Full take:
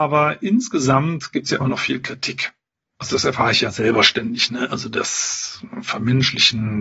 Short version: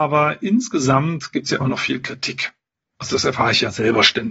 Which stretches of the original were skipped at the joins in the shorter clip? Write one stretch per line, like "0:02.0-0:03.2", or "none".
none